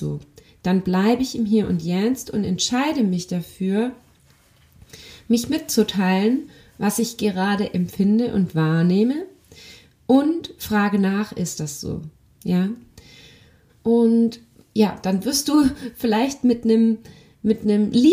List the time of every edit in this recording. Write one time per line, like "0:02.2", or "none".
0:13.7